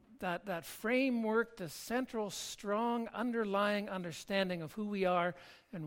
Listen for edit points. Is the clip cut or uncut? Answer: uncut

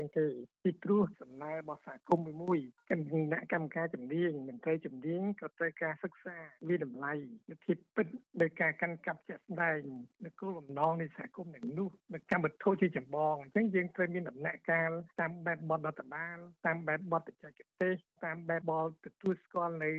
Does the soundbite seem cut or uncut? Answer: cut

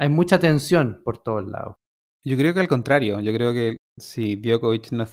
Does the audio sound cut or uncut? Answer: cut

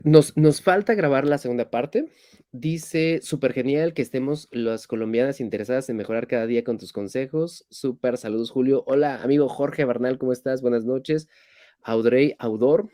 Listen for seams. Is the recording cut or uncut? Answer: uncut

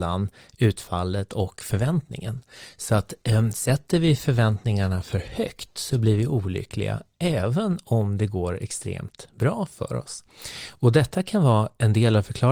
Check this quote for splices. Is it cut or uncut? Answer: uncut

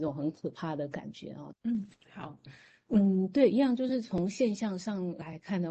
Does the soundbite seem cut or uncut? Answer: cut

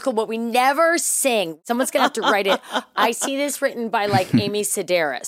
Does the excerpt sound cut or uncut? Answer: uncut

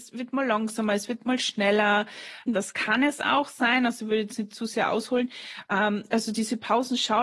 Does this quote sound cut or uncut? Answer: cut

